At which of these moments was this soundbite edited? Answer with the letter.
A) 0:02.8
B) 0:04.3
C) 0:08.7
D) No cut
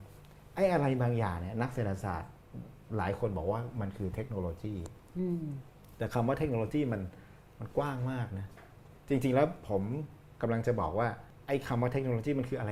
A